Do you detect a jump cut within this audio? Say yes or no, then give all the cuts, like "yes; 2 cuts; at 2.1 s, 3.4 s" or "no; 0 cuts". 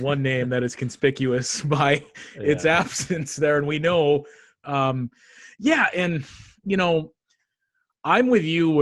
yes; 1 cut; at 4.6 s